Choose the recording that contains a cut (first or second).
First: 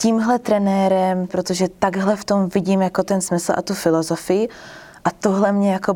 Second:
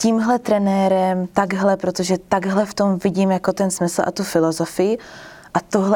first